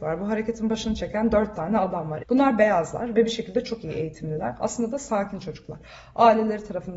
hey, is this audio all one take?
no; 1 cut; at 2.2 s

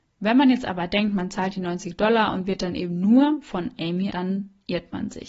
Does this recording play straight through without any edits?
no; 1 cut; at 4.1 s

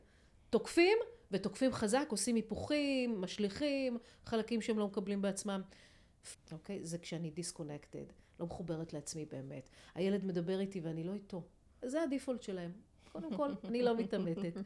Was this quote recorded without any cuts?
no; 2 cuts; at 6.3 s, 11.8 s

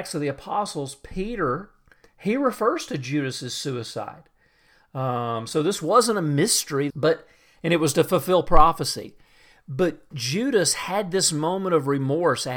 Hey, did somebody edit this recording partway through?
yes; 2 cuts; at 2.0 s, 6.9 s

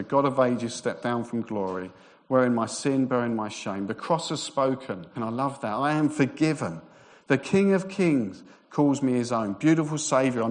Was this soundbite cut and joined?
yes; 1 cut; at 5.2 s

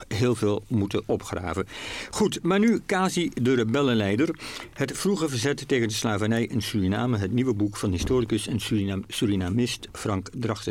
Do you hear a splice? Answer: no; 0 cuts

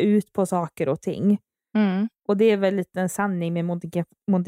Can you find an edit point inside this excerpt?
no; 0 cuts

